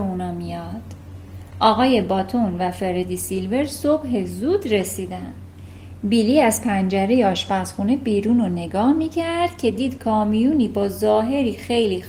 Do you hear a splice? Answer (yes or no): no